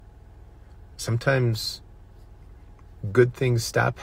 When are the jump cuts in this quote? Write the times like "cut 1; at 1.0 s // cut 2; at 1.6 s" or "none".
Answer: cut 1; at 0.9 s